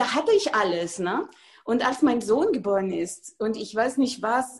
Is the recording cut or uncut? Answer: uncut